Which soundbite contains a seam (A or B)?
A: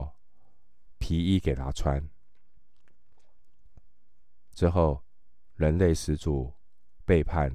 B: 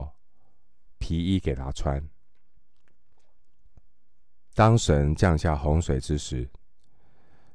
A